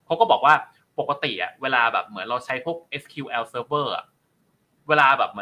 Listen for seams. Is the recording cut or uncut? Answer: uncut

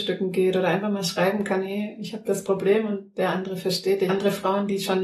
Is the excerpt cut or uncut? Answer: cut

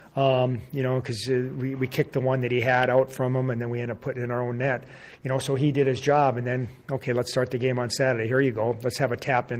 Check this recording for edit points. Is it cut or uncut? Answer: uncut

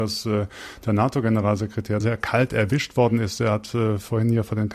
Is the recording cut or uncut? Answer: cut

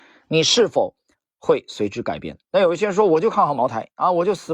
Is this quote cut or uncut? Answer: uncut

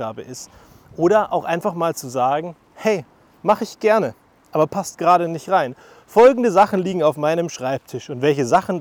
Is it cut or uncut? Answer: uncut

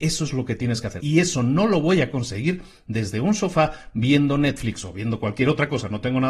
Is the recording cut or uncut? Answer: cut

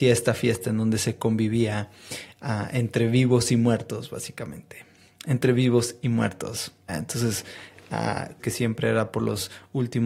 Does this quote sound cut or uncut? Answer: cut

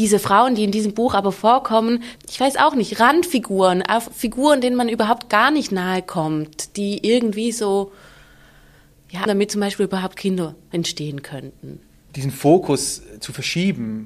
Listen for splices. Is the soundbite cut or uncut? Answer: cut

